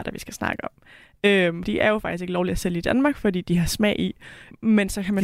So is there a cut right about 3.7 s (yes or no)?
no